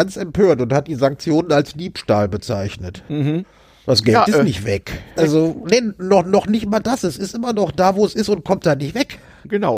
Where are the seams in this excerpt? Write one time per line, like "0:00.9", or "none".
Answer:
0:05.2